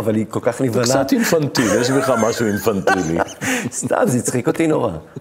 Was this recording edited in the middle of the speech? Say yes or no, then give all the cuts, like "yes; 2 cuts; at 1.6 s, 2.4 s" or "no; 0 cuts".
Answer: no; 0 cuts